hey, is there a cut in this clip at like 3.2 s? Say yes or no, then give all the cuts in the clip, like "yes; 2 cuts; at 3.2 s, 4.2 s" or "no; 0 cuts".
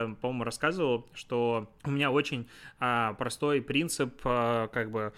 no; 1 cut; at 1.8 s